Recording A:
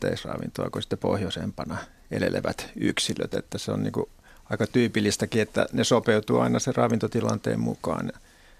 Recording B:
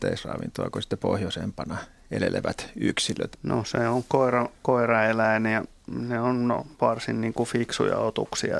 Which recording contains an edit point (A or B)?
B